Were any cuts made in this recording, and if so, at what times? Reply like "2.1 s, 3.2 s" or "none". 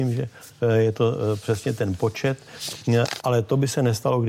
3.2 s